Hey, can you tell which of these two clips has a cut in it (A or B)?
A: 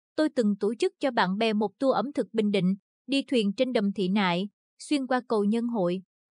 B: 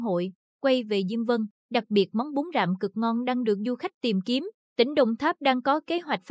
B